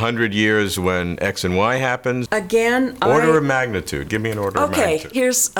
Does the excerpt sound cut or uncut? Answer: cut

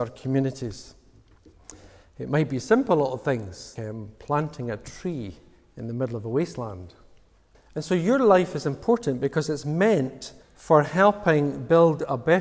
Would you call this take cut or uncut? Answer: cut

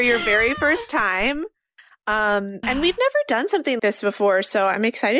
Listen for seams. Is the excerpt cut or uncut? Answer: cut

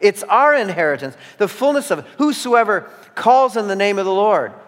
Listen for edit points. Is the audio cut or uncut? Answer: uncut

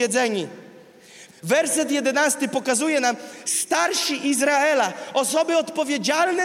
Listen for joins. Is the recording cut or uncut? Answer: cut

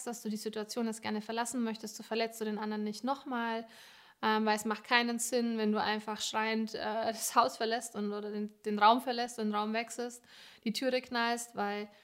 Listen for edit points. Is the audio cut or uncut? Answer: uncut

